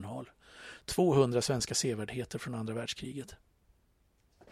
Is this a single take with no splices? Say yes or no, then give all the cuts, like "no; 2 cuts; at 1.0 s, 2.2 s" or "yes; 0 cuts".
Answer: yes; 0 cuts